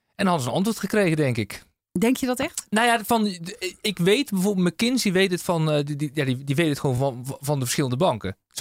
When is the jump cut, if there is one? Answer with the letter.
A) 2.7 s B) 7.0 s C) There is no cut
C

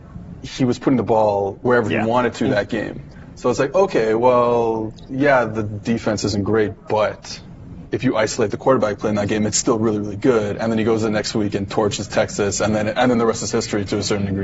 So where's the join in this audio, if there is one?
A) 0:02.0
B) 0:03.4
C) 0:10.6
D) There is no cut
D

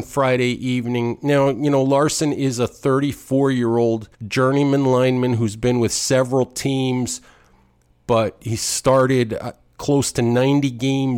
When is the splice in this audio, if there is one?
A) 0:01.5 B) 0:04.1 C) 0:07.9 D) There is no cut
B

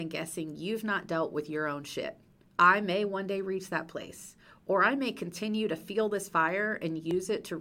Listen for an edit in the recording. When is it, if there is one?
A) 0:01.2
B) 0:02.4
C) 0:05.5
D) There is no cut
B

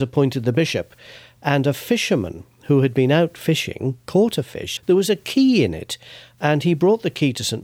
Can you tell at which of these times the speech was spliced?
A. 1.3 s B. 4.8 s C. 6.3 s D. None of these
B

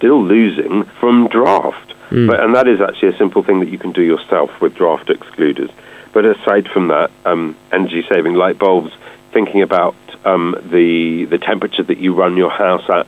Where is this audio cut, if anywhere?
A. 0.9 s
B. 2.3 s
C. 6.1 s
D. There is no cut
A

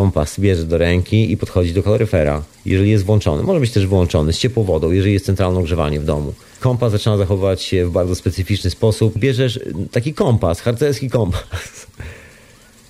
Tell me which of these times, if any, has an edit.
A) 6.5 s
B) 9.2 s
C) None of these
B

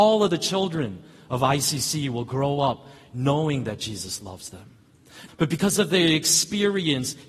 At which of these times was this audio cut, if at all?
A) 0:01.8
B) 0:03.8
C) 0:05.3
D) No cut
C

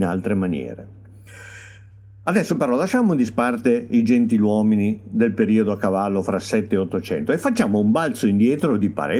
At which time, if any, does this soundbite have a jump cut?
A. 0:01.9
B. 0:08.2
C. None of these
C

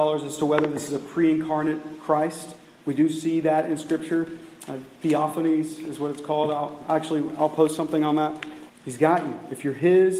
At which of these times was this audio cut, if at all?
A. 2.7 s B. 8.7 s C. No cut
B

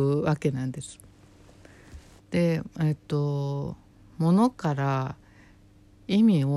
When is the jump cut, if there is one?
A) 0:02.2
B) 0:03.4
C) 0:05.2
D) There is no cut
A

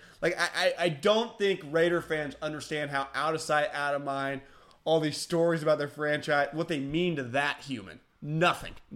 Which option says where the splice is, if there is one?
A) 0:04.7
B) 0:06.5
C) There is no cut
C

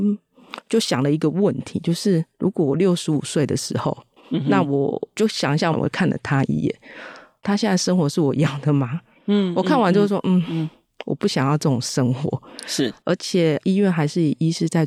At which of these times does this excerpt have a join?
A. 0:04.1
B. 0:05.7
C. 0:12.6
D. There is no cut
B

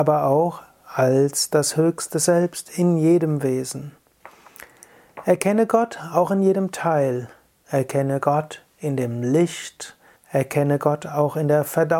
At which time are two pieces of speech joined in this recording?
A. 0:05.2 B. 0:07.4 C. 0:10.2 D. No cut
C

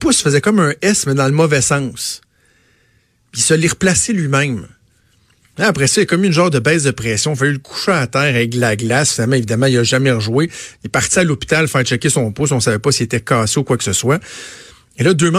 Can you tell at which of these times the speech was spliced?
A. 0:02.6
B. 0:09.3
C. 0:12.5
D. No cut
D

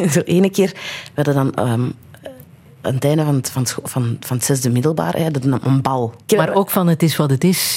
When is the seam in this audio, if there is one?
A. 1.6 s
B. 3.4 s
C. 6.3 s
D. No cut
C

